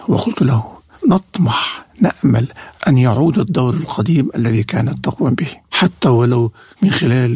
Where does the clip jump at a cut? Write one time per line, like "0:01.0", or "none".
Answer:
0:02.8

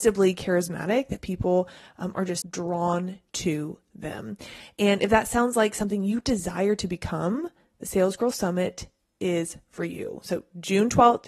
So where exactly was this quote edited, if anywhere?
0:02.4

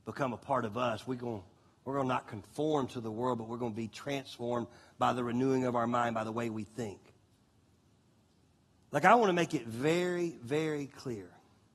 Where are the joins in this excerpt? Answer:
none

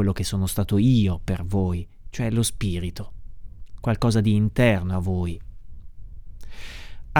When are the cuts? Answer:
none

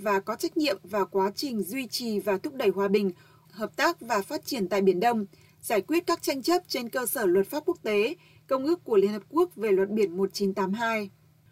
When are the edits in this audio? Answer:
0:03.4

